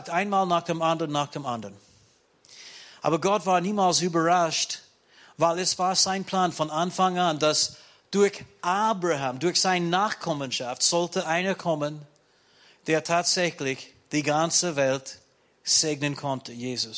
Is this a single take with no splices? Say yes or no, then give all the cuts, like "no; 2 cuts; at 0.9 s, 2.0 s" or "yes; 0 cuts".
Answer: yes; 0 cuts